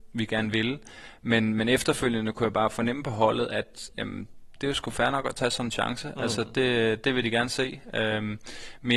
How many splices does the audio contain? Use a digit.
0